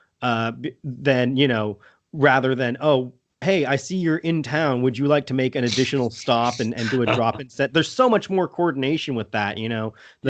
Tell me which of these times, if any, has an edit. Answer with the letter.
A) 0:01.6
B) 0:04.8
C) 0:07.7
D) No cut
D